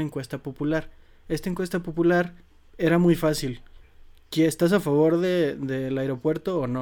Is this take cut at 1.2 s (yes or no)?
no